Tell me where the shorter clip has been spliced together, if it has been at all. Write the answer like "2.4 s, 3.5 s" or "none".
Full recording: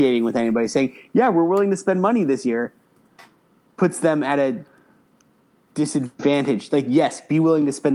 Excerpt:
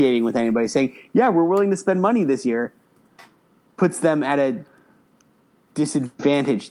none

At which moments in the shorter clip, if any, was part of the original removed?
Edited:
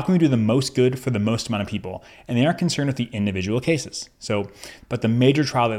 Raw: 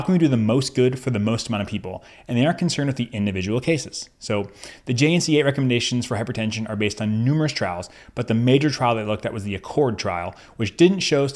4.8 s

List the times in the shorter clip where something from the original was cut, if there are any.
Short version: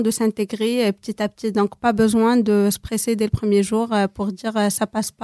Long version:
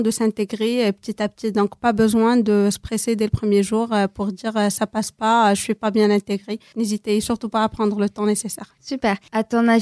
none

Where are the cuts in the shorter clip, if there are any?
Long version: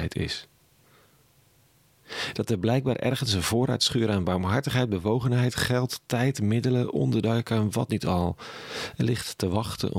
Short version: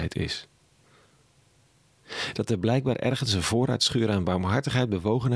none

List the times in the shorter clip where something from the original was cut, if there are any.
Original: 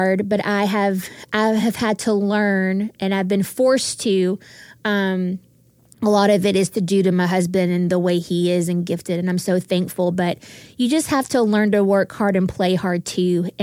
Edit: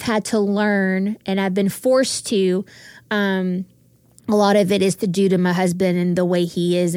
none

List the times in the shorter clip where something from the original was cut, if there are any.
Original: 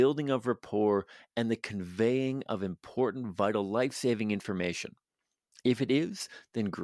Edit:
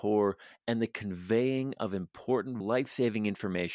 2.6 s

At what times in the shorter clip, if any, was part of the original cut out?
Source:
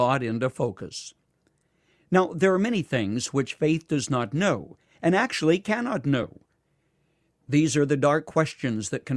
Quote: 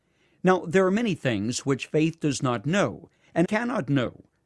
3.4 s

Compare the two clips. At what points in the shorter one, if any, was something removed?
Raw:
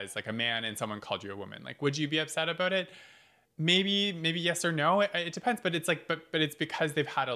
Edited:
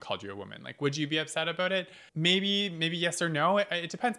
2.1 s

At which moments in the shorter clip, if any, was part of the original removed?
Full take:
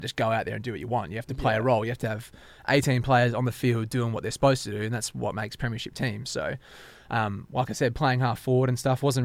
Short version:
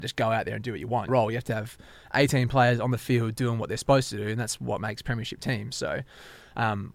1.1 s

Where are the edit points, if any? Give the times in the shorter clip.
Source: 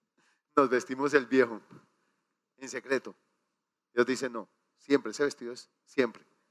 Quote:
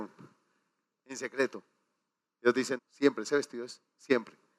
2.8 s

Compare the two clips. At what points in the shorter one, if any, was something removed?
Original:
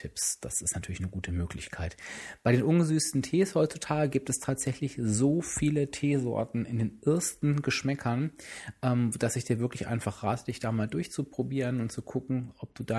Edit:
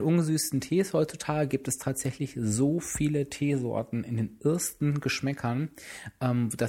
none

